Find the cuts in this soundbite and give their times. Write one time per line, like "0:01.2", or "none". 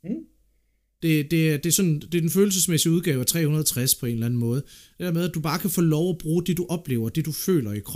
0:01.0